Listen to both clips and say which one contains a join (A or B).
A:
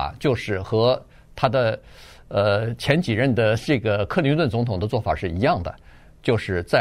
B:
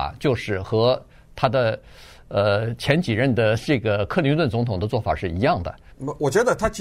B